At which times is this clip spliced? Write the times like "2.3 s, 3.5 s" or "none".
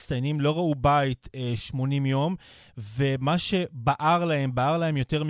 none